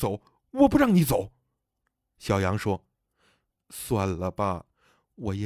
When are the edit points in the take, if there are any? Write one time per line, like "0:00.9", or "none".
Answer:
none